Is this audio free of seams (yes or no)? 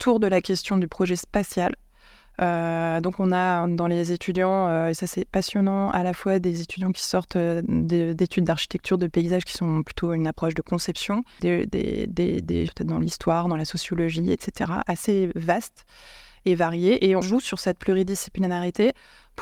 no